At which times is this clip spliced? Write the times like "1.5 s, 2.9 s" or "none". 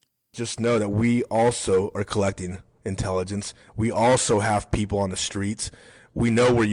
none